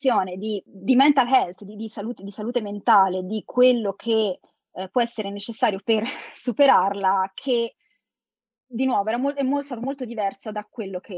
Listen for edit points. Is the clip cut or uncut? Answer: uncut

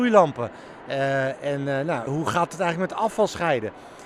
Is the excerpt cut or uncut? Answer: cut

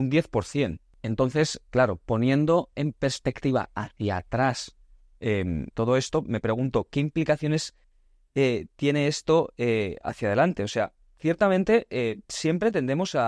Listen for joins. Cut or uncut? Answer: cut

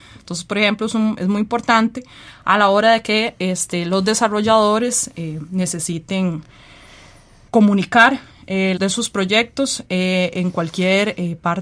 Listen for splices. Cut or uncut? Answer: cut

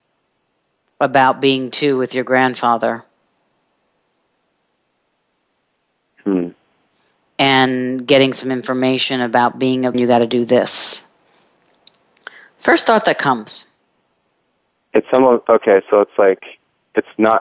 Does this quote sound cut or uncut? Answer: cut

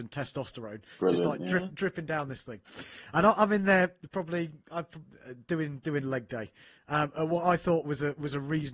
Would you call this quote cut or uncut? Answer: uncut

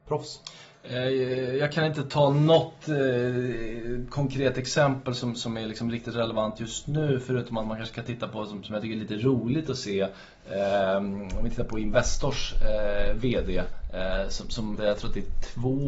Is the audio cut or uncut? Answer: cut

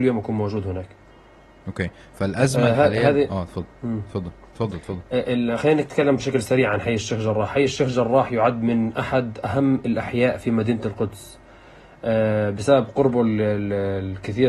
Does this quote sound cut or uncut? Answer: uncut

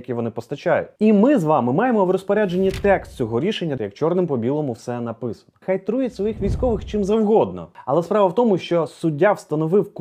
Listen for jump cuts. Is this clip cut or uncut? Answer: cut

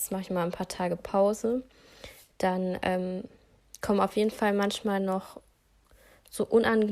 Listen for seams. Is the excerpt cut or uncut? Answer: uncut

